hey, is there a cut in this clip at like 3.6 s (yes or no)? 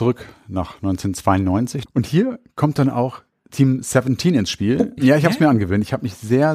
no